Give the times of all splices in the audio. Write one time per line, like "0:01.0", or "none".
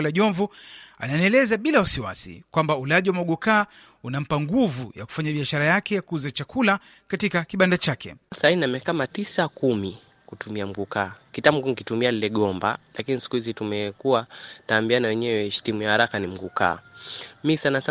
none

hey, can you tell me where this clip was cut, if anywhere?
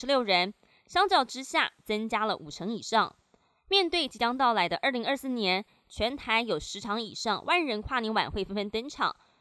none

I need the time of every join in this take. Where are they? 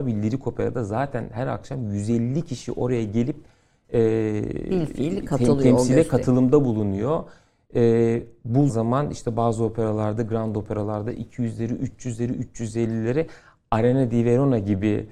0:08.7

